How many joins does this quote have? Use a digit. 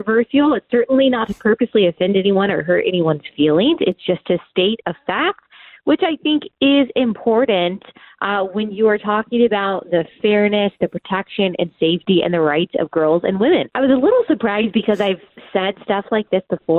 1